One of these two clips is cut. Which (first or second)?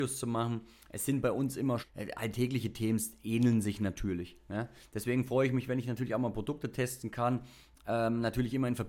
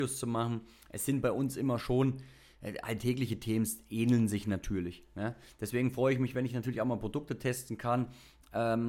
first